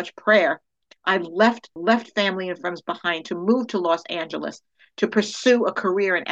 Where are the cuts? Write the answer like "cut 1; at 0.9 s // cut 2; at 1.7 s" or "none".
cut 1; at 1.8 s